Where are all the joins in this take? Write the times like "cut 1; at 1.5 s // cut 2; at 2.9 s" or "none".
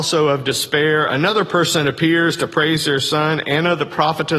none